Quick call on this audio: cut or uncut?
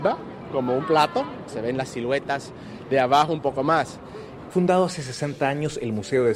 cut